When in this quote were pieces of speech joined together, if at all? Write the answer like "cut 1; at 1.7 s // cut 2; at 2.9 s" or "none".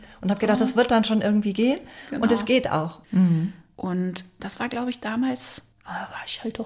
cut 1; at 3.0 s